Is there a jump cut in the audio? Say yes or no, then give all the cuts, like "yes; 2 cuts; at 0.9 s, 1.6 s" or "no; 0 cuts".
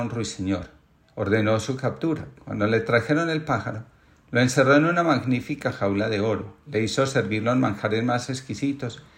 yes; 1 cut; at 1.0 s